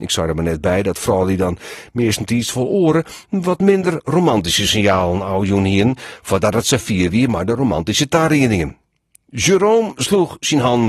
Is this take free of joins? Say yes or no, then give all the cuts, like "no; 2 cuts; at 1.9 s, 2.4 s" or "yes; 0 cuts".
yes; 0 cuts